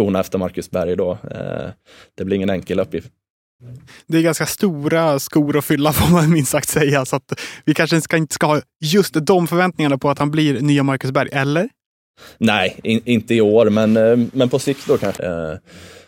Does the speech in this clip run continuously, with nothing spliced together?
no; 1 cut; at 15.2 s

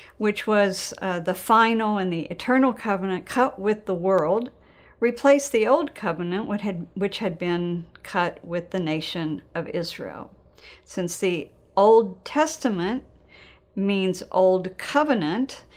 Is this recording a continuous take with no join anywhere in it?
yes; 0 cuts

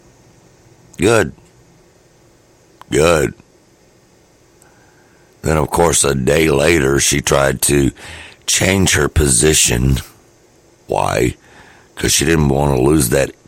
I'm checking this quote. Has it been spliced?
no; 0 cuts

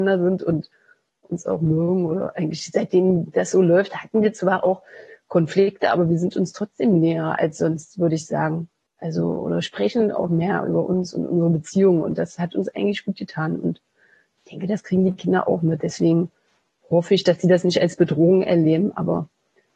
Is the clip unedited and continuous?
yes; 0 cuts

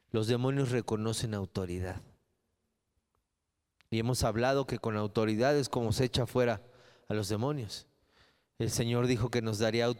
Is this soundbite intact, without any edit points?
yes; 0 cuts

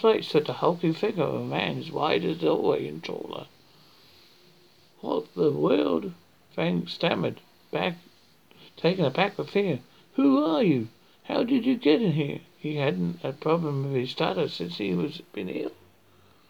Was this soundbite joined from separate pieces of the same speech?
no; 0 cuts

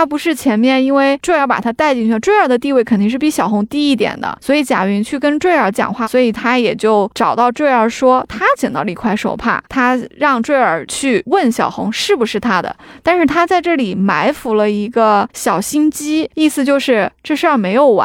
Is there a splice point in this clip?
yes; 2 cuts; at 6.0 s, 16.3 s

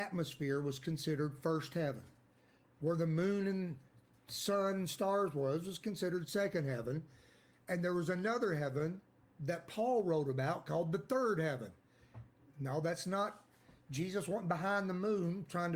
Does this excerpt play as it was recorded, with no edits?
yes; 0 cuts

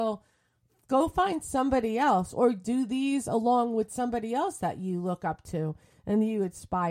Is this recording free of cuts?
yes; 0 cuts

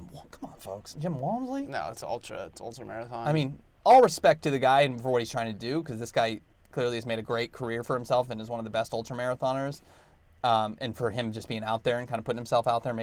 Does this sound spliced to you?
no; 0 cuts

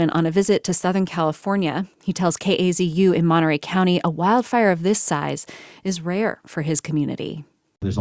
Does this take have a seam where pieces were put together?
yes; 1 cut; at 1.9 s

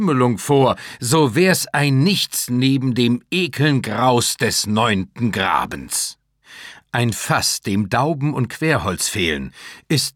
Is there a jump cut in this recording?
no; 0 cuts

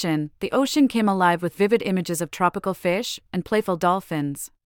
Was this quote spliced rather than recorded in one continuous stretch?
yes; 1 cut; at 3.3 s

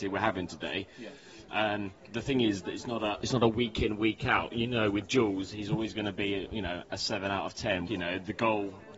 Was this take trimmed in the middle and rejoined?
yes; 1 cut; at 7.9 s

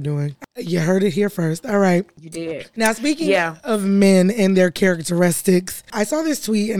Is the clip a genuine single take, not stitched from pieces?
yes; 0 cuts

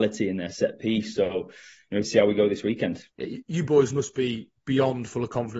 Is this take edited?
yes; 2 cuts; at 2.0 s, 3.1 s

